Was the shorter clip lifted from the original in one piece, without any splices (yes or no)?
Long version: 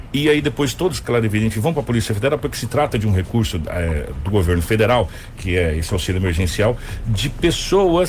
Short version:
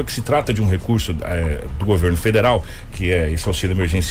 yes